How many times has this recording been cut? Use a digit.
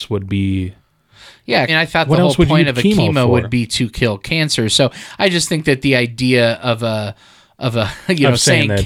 1